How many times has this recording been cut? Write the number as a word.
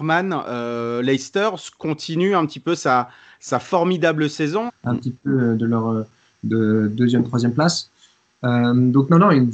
one